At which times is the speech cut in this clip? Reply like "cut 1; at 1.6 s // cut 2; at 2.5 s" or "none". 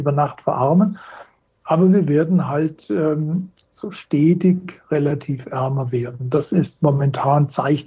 none